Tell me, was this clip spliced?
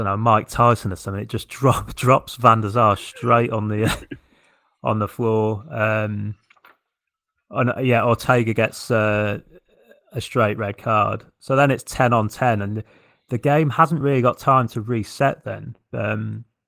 no; 0 cuts

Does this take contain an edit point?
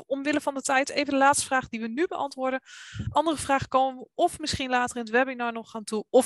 no; 0 cuts

